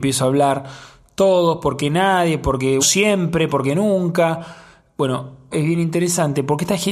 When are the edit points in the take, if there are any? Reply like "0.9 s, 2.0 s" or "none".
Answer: 2.8 s, 5.5 s